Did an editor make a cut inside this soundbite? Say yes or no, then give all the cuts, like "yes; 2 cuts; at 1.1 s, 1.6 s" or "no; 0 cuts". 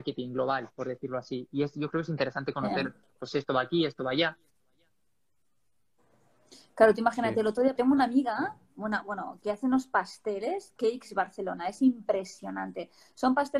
yes; 1 cut; at 7.8 s